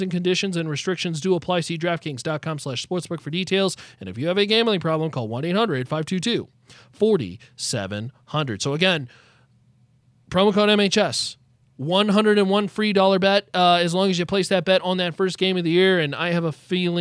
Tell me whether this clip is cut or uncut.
uncut